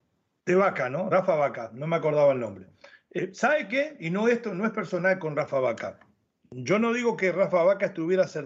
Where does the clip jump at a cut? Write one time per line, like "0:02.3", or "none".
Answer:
none